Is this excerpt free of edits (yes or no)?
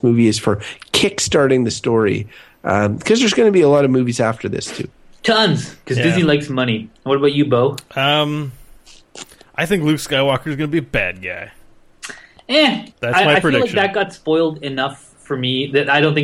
no